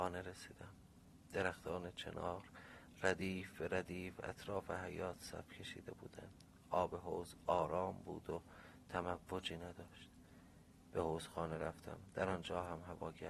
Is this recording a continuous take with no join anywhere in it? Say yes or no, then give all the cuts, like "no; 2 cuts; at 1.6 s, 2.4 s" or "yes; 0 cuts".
yes; 0 cuts